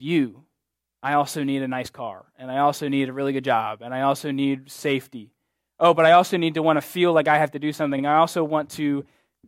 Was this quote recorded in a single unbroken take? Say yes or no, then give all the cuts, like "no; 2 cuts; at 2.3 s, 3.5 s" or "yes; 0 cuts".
yes; 0 cuts